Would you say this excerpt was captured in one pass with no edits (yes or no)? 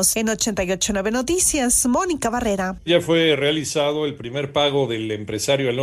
no